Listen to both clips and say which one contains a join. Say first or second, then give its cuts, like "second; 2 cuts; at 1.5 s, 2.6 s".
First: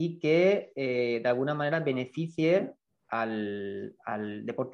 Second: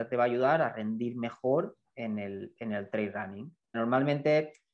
second; 1 cut; at 3.7 s